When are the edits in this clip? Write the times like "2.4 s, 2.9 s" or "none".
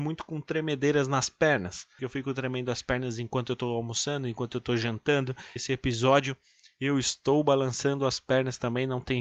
2.0 s, 5.6 s